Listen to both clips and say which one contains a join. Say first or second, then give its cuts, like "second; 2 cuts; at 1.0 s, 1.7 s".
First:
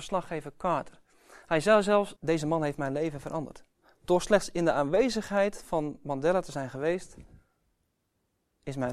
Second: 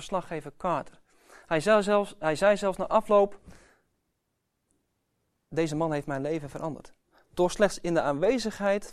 first; 1 cut; at 2.2 s